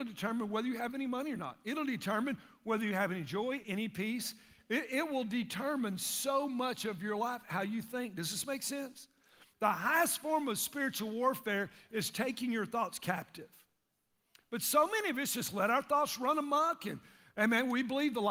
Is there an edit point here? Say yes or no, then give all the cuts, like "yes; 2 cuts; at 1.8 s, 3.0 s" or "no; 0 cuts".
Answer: yes; 1 cut; at 3.6 s